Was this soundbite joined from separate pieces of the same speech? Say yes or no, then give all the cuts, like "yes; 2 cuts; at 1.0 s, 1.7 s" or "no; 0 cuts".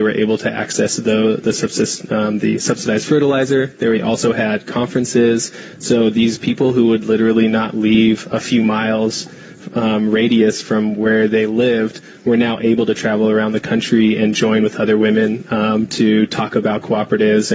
no; 0 cuts